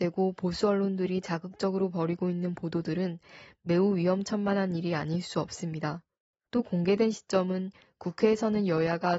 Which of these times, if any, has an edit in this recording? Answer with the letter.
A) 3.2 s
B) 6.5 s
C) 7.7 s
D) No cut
B